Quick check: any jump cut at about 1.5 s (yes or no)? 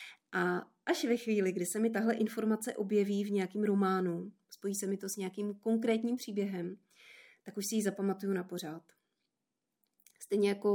no